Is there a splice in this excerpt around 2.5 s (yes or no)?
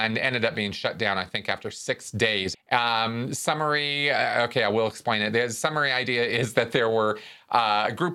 yes